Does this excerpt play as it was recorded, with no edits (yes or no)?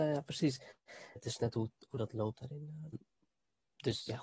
no